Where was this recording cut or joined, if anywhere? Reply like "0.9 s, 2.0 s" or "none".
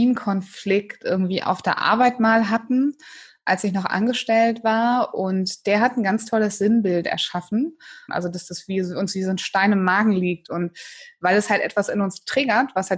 8.1 s